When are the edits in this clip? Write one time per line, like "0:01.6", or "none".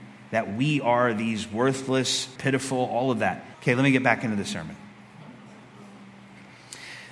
0:02.4
0:03.5